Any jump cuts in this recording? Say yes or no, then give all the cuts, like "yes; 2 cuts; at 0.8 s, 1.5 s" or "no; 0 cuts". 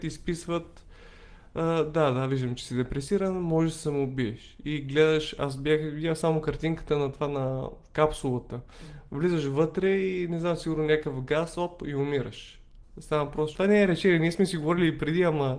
yes; 1 cut; at 13.6 s